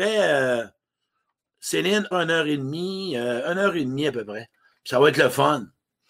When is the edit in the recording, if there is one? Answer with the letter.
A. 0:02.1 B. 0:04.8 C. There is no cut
A